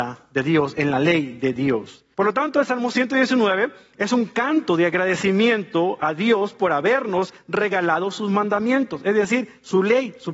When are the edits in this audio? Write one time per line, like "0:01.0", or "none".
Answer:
0:02.1